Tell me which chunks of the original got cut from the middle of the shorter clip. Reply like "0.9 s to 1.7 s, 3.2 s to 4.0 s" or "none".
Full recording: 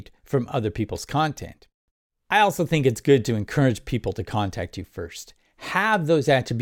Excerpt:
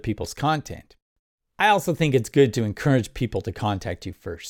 none